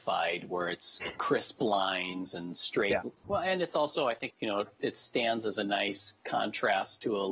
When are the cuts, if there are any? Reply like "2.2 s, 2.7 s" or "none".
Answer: 3.2 s, 4.3 s